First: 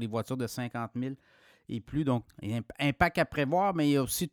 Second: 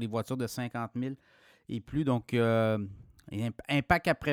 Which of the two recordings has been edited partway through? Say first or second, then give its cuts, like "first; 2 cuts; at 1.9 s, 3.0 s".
first; 1 cut; at 2.3 s